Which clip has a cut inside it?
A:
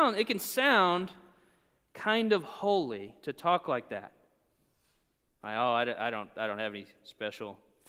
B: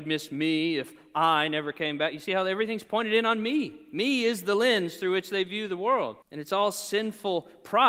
B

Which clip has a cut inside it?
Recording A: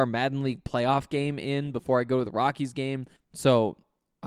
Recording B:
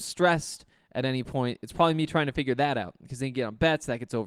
A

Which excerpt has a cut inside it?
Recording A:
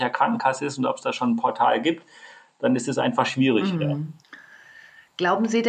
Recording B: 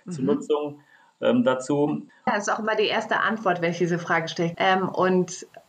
B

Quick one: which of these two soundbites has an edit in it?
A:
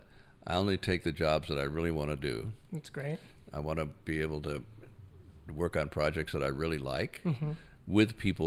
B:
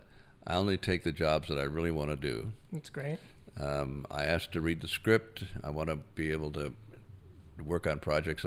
A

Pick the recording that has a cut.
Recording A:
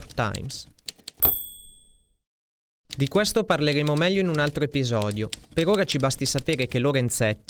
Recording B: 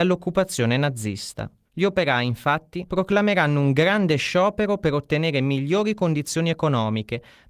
A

